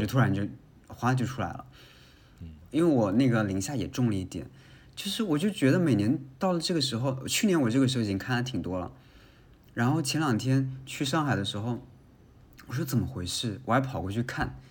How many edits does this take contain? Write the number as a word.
zero